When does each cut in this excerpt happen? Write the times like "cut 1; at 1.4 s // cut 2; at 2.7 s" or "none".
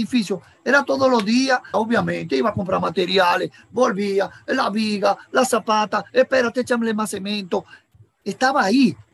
cut 1; at 1.7 s